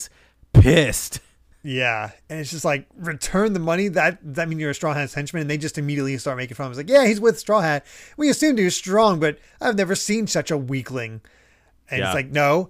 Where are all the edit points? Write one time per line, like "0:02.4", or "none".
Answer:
none